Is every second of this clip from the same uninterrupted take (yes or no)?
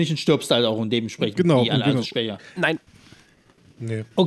no